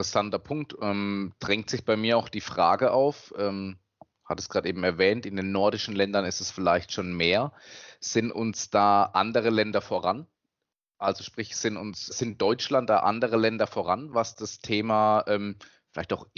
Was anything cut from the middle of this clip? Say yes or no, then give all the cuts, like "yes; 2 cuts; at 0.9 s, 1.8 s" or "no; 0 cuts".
yes; 1 cut; at 12.1 s